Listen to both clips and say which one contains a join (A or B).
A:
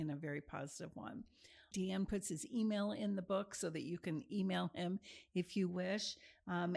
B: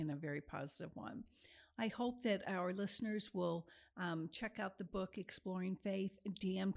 A